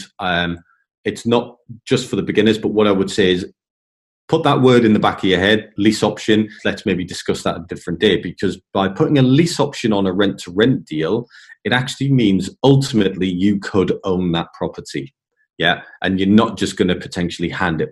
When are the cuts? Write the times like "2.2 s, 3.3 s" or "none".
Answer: 6.6 s